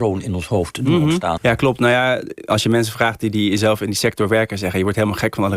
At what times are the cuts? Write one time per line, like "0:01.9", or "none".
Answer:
0:01.4